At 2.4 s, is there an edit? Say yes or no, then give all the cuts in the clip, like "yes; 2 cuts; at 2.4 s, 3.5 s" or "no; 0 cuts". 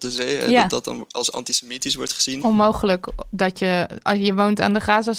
yes; 1 cut; at 2.4 s